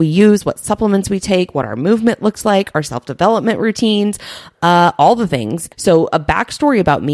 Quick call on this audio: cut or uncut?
cut